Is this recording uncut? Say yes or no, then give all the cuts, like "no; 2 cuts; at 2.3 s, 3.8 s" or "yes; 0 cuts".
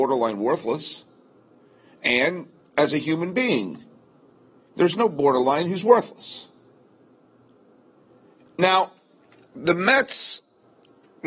yes; 0 cuts